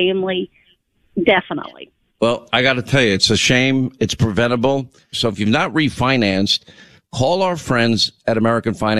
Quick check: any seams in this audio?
yes; 1 cut; at 5.1 s

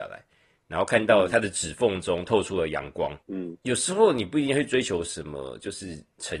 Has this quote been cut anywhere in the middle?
yes; 1 cut; at 3.2 s

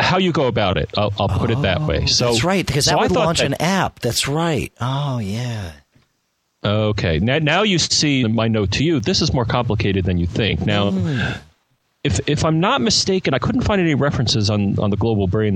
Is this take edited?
yes; 1 cut; at 8.2 s

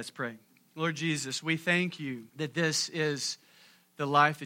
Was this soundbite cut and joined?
yes; 1 cut; at 2.3 s

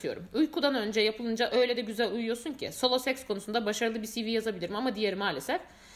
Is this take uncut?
yes; 0 cuts

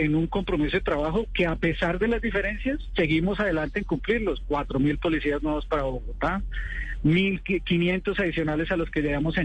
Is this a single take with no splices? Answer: yes; 0 cuts

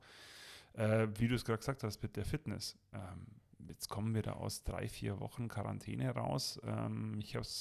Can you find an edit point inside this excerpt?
no; 0 cuts

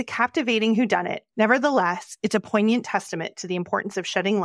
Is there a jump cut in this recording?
yes; 1 cut; at 1.3 s

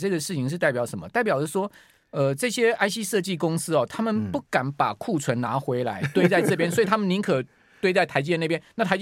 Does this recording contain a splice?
no; 0 cuts

